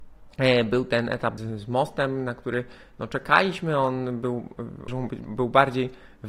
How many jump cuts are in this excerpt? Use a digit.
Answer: 2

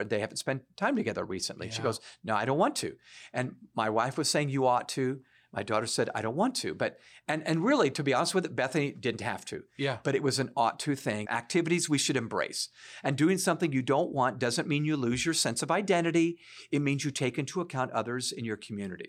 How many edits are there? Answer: 1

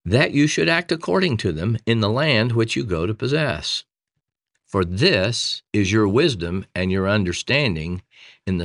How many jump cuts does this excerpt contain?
2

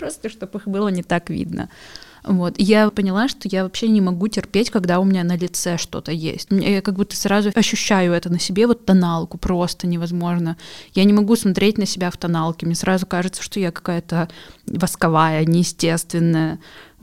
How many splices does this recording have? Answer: 1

